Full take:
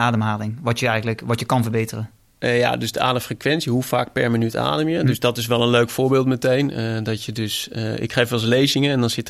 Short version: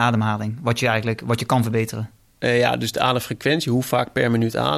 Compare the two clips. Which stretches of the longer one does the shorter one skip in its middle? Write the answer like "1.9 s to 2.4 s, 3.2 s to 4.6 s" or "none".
none